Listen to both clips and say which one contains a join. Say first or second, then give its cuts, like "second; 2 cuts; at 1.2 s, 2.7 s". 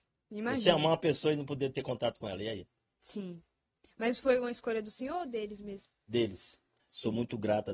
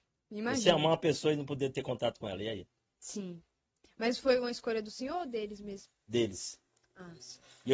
first; 1 cut; at 6.8 s